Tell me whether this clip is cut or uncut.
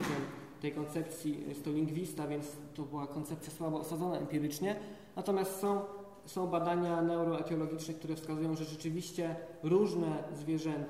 uncut